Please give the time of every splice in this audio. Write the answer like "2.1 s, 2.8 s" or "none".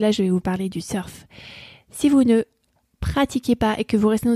none